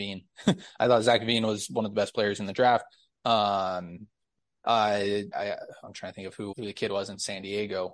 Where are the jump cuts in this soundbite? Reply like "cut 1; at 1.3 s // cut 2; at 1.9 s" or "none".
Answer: cut 1; at 5.3 s // cut 2; at 6.5 s